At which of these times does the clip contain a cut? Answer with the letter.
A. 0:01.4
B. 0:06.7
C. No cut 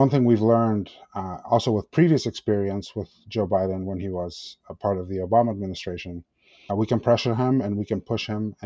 B